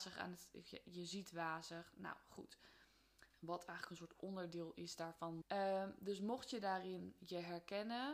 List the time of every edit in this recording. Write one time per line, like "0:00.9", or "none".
0:03.3
0:05.4